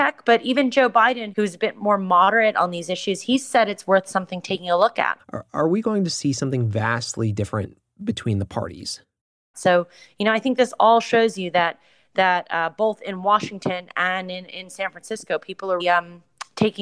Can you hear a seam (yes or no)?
yes